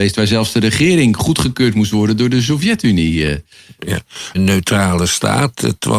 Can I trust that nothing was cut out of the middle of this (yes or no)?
no